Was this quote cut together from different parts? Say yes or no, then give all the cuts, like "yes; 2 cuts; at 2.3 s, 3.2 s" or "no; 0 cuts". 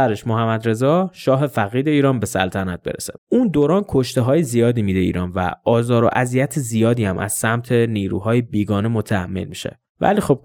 yes; 1 cut; at 3.2 s